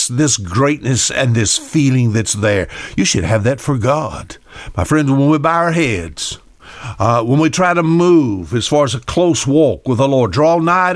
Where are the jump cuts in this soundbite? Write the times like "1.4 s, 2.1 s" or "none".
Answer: none